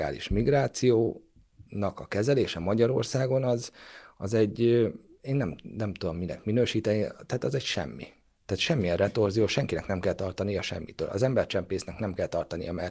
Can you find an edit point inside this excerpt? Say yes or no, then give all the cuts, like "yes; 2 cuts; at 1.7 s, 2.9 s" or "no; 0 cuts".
no; 0 cuts